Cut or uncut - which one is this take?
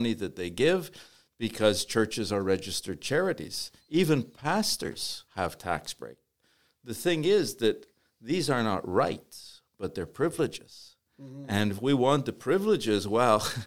cut